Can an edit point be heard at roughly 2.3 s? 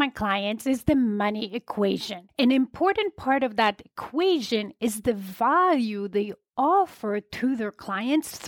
yes; 1 cut; at 2.3 s

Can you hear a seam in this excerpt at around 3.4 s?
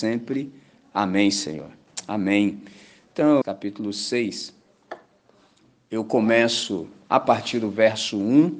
yes; 1 cut; at 3.4 s

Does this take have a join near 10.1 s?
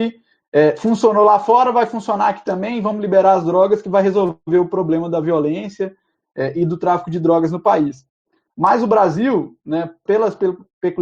yes; 1 cut; at 10.1 s

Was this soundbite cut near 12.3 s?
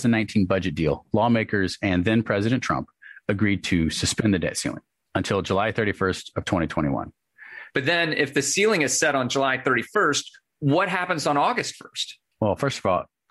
no; 1 cut; at 7.7 s

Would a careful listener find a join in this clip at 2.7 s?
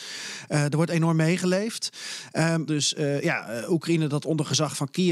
yes; 1 cut; at 2.7 s

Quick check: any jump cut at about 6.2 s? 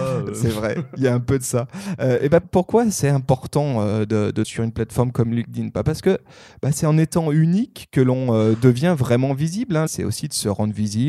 no; 3 cuts; at 2.4 s, 4.4 s, 9.9 s

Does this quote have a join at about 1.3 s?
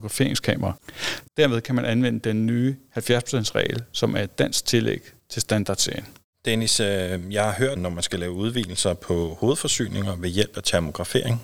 yes; 3 cuts; at 1.3 s, 6.2 s, 7.8 s

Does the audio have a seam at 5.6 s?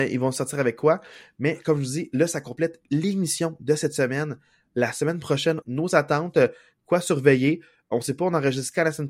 yes; 1 cut; at 5.6 s

